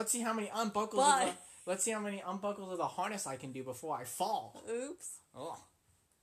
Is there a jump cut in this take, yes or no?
no